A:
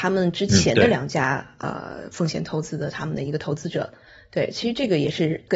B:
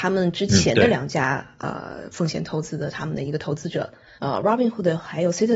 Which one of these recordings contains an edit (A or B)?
B